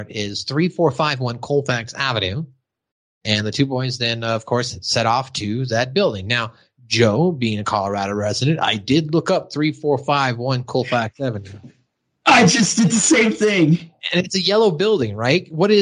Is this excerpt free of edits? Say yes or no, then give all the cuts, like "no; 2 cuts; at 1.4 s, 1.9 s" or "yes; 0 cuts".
yes; 0 cuts